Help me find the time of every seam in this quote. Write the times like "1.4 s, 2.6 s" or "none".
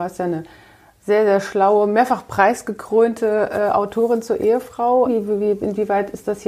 5.1 s